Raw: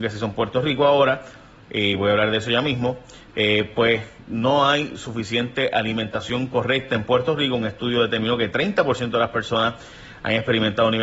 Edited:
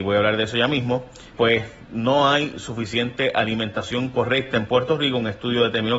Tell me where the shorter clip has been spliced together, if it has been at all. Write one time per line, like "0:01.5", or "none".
0:01.4